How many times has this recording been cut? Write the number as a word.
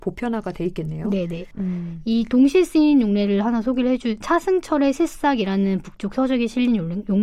two